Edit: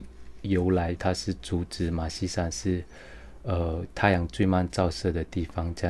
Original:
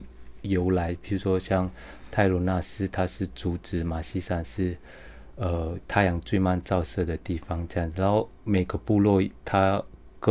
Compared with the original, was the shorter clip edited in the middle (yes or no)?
yes